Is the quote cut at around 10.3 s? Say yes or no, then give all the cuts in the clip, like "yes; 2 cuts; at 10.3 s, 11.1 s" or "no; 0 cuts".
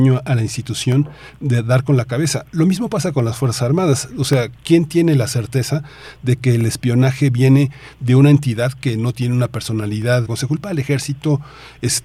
yes; 1 cut; at 10.3 s